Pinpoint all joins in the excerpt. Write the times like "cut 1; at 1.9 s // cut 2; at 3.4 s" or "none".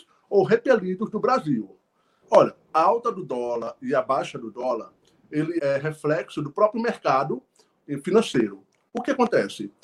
cut 1; at 2.2 s // cut 2; at 5.6 s